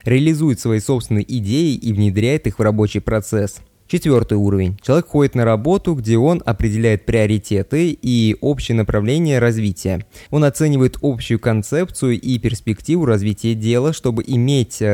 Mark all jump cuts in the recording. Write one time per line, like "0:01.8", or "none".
0:03.8
0:10.3